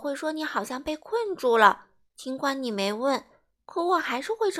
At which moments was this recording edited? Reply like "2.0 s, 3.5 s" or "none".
none